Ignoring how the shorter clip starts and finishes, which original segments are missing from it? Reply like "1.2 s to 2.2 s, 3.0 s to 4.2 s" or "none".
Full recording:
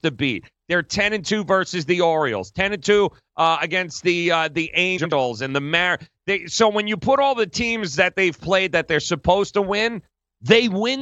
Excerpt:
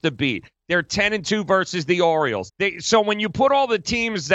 2.5 s to 6.2 s